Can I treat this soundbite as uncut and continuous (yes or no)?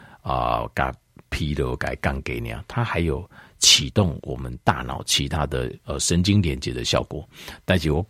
yes